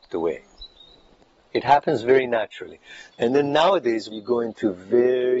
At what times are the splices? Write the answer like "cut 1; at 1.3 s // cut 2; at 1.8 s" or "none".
cut 1; at 3.1 s // cut 2; at 4.1 s